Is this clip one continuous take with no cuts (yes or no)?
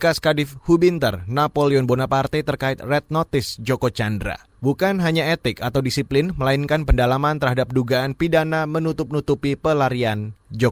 yes